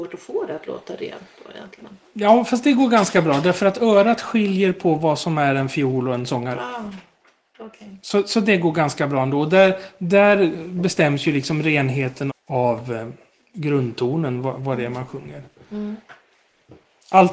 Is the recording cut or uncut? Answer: cut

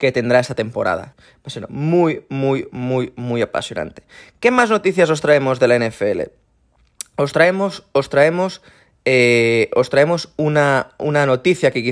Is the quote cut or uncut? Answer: cut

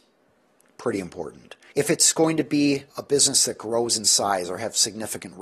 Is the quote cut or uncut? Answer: cut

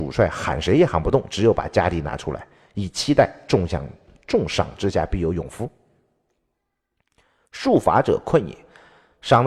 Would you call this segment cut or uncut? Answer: uncut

